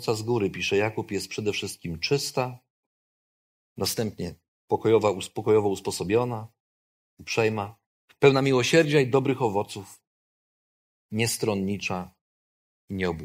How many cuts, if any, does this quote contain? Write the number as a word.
one